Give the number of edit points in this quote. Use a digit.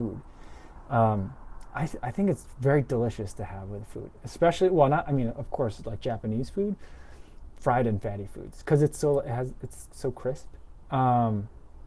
2